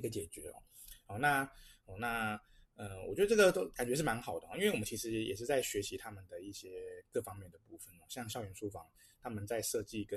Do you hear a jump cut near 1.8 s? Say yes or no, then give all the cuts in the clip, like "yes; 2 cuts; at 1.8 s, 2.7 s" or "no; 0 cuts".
yes; 1 cut; at 1.8 s